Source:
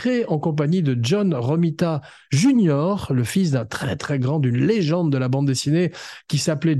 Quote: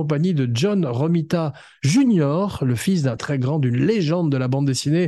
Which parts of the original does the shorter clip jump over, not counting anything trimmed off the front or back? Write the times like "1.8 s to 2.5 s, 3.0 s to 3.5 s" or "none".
3.7 s to 4.0 s